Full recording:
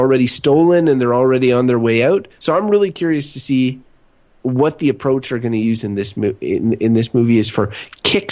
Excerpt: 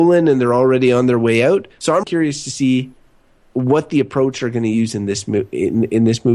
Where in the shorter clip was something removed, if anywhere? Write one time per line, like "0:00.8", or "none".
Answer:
0:02.0